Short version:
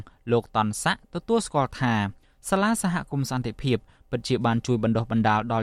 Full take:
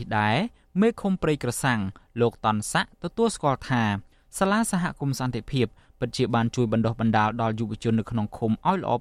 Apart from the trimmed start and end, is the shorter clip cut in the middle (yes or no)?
no